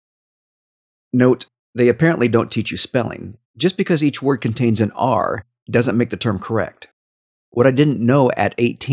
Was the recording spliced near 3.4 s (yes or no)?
yes